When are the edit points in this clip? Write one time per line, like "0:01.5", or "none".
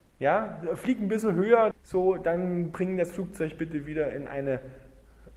0:01.7

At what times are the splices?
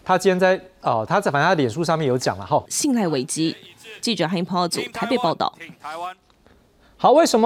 0:02.7

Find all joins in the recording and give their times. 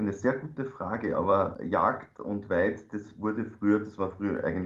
none

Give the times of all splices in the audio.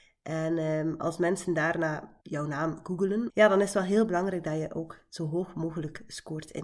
0:02.2
0:03.3

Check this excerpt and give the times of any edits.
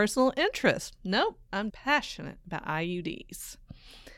0:01.7

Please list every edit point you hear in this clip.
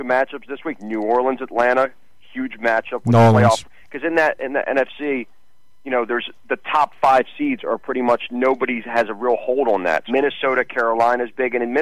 0:10.1

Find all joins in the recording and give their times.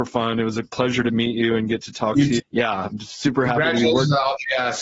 0:02.4

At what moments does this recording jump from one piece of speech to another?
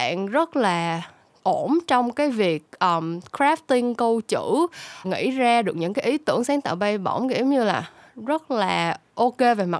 0:05.0

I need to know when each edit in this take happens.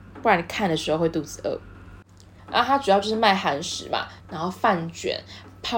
0:02.4
0:04.2

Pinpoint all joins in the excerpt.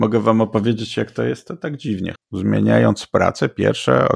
0:02.1

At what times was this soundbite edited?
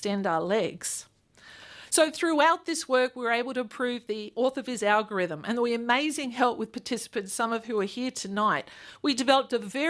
none

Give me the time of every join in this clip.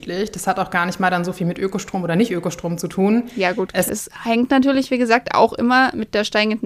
0:03.9

